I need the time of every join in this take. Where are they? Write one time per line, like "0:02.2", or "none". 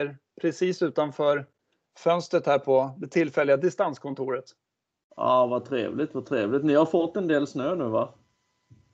none